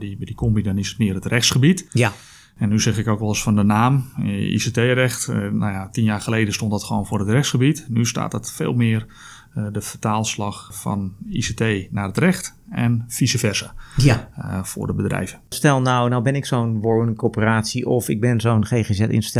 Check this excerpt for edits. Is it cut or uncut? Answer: uncut